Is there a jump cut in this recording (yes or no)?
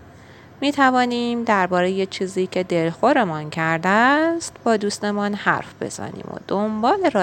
no